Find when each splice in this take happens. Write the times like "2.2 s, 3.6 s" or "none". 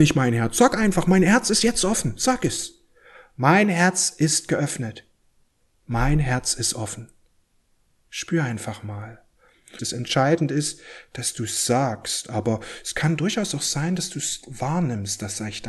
9.8 s